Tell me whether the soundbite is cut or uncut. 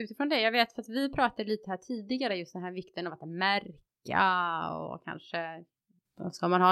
uncut